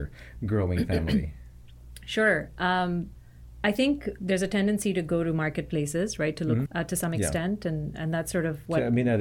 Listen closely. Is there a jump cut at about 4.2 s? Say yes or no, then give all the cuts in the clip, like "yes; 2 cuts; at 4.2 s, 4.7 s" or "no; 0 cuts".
yes; 2 cuts; at 4.2 s, 6.7 s